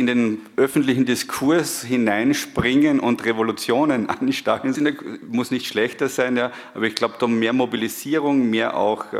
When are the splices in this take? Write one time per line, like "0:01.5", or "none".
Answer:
0:04.7

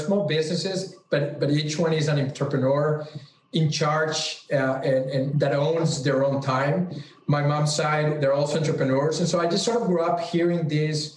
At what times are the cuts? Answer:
0:05.3

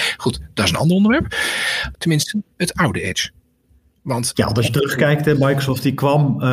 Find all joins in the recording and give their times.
0:01.9

